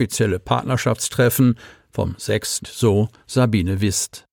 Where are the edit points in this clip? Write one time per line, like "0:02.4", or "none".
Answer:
0:02.6